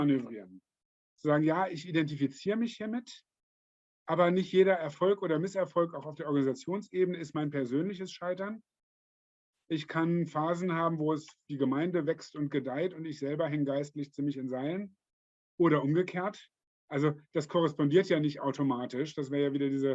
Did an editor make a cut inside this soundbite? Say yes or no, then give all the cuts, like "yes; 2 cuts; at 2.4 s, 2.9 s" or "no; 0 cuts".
no; 0 cuts